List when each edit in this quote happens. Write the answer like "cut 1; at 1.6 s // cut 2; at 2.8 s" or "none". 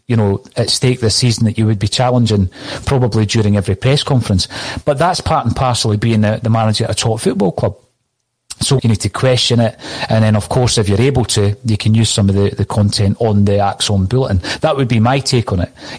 cut 1; at 8.8 s